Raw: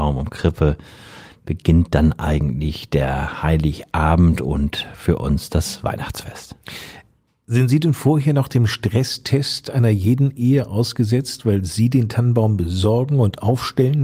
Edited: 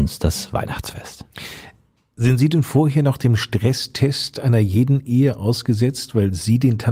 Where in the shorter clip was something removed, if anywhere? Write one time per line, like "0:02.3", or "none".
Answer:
none